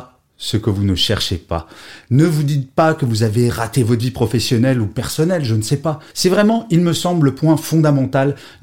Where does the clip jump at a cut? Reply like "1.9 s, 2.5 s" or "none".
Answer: 2.0 s, 6.1 s